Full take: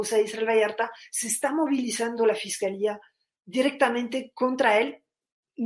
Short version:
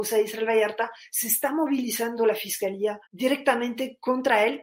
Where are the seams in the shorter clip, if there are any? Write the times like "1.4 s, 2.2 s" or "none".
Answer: 3.1 s